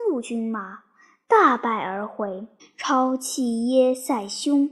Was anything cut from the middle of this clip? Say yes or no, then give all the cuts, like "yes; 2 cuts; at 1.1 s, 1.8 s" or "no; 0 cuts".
yes; 1 cut; at 2.6 s